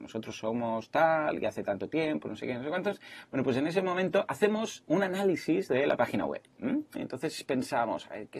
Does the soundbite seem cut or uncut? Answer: cut